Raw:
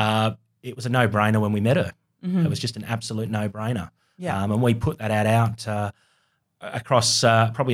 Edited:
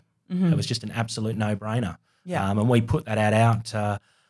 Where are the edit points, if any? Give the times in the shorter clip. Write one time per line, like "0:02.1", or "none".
none